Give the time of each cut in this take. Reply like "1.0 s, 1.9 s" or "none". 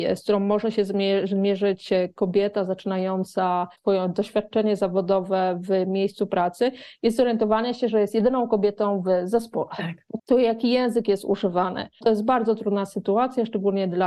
10.2 s, 12.0 s